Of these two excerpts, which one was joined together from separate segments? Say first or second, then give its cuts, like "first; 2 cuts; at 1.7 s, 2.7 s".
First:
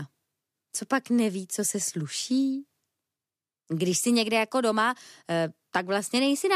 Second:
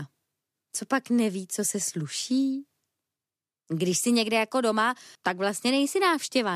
second; 1 cut; at 5.2 s